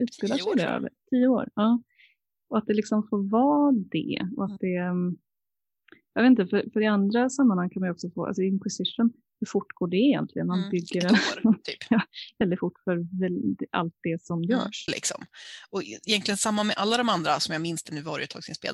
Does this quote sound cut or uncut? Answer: cut